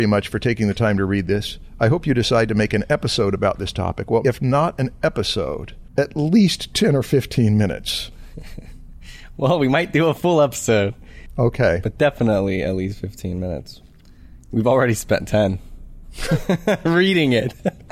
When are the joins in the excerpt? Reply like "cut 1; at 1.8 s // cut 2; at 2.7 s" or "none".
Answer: cut 1; at 4.2 s